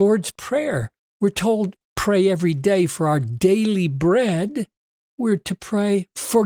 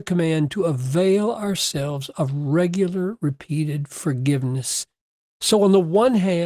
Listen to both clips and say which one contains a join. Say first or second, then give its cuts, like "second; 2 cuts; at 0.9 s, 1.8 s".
first; 1 cut; at 1.9 s